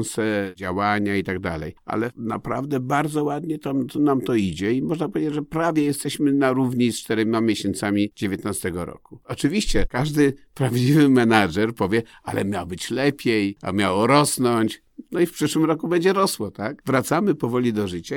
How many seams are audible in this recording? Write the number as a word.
one